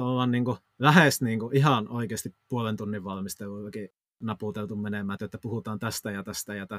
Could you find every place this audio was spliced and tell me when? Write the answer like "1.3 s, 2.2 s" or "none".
5.2 s

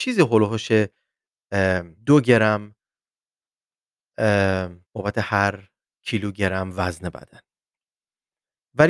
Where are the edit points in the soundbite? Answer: 2.0 s, 4.8 s

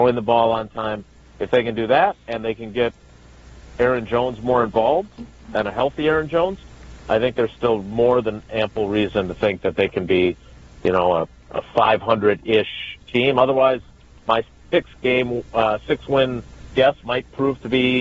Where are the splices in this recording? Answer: none

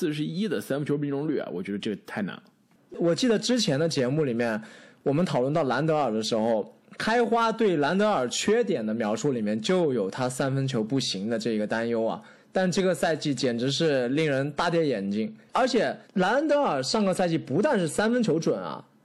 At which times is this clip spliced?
2.9 s, 16.0 s

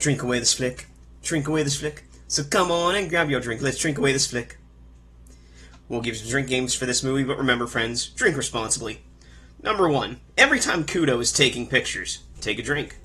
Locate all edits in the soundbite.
10.3 s

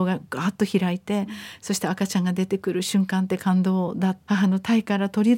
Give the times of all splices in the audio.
4.3 s

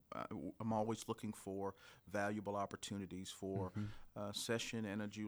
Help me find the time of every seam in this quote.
4.1 s

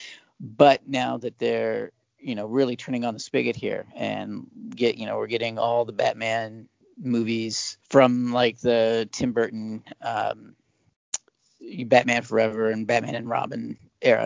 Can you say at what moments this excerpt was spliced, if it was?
7.8 s

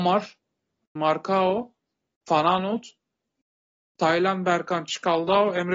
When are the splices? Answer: 1.0 s

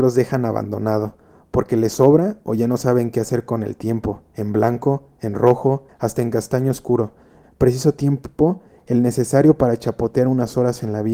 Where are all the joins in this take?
5.9 s, 7.4 s

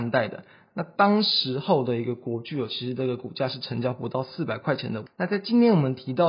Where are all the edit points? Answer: 5.1 s

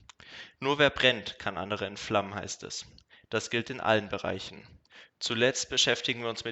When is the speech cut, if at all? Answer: 5.1 s

